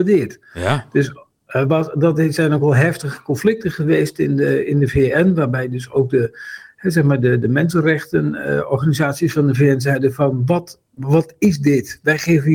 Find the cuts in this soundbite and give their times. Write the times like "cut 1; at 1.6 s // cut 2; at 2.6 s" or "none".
none